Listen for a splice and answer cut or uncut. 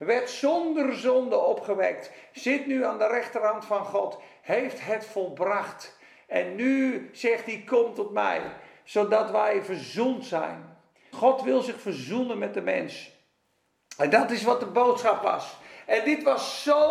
cut